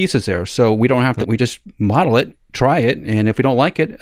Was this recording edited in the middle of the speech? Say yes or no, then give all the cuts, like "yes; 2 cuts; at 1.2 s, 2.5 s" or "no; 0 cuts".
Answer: yes; 1 cut; at 1.2 s